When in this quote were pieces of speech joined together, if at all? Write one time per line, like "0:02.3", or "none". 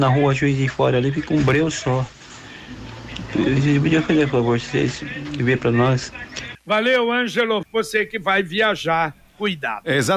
0:06.5
0:07.6

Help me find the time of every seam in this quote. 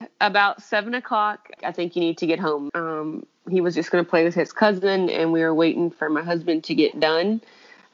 0:01.6
0:02.7

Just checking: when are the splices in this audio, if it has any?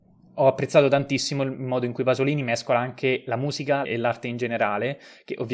0:03.8

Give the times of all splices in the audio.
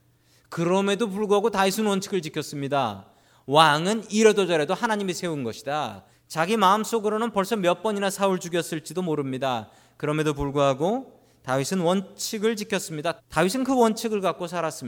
0:06.1
0:13.2

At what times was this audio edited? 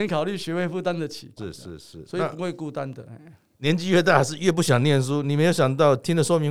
0:01.4
0:03.5

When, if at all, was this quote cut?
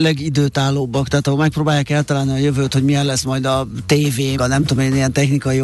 0:04.4

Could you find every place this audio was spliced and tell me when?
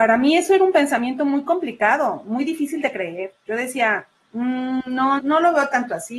0:05.2

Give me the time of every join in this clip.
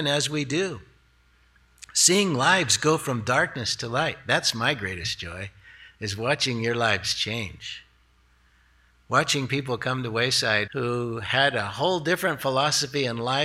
0:10.7

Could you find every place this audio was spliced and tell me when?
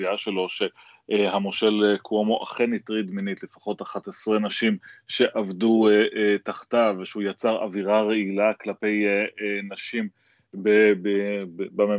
none

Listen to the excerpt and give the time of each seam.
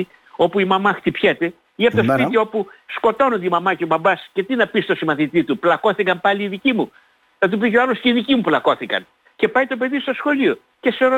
0:09.3

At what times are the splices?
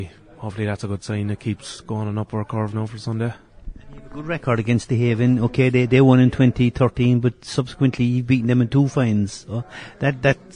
none

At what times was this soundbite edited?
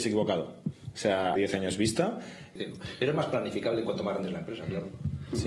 0:01.4
0:02.6

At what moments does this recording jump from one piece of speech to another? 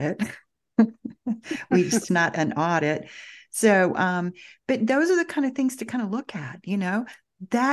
0:02.1

